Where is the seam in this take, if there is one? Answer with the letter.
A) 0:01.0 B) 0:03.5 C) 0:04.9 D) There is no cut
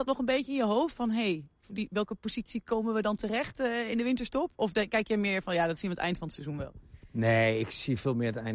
D